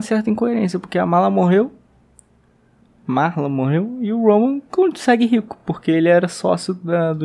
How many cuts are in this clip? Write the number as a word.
zero